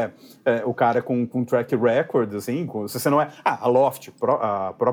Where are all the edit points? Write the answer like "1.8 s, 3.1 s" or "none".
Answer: none